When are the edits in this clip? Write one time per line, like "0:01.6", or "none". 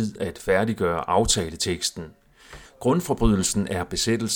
0:02.7